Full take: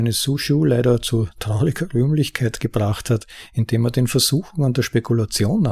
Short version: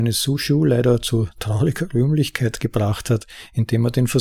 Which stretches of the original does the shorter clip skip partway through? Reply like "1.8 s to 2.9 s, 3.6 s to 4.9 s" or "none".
none

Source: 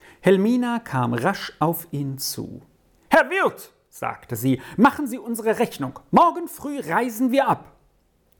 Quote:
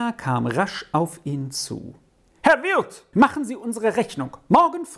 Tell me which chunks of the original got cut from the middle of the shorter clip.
3.8 s to 4.8 s

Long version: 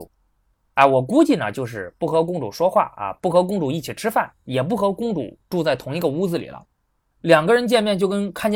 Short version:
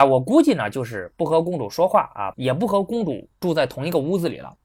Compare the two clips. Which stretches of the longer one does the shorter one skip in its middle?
3.1 s to 4.4 s

